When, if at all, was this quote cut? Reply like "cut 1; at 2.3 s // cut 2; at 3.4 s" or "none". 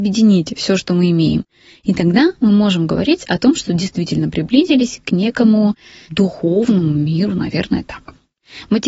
cut 1; at 6.1 s

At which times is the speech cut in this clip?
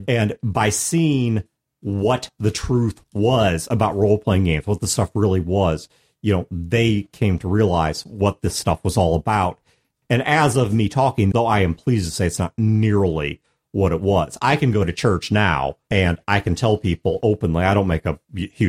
cut 1; at 10.0 s // cut 2; at 11.3 s

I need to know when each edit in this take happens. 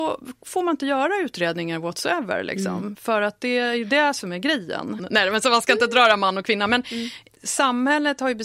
cut 1; at 5.0 s

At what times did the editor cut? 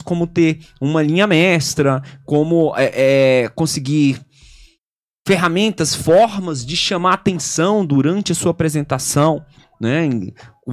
none

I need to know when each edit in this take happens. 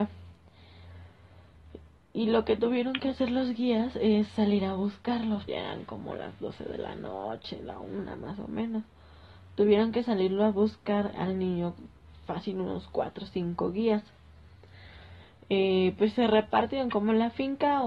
cut 1; at 5.5 s // cut 2; at 11.1 s

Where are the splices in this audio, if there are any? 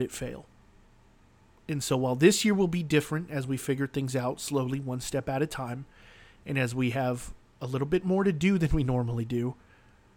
none

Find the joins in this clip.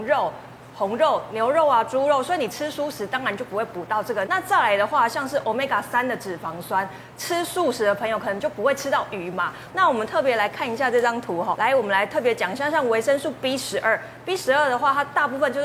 cut 1; at 4.3 s // cut 2; at 9.7 s // cut 3; at 11.5 s

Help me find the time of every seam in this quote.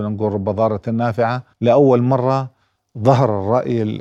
cut 1; at 1.5 s

